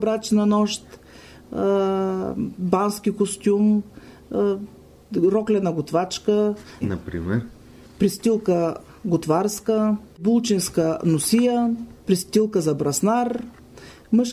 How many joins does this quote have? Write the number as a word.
one